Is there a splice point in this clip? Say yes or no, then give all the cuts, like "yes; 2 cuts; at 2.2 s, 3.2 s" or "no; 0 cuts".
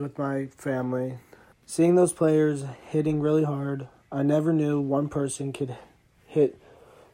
yes; 1 cut; at 1.5 s